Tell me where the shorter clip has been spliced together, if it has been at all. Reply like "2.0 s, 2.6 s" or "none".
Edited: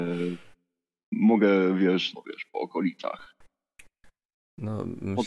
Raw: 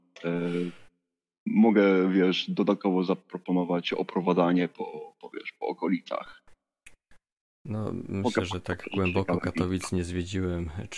2.1 s